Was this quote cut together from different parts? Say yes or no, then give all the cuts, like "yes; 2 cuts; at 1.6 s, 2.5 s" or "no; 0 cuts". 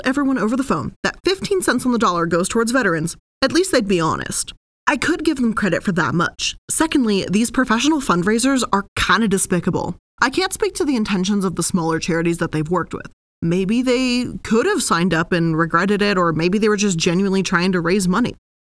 no; 0 cuts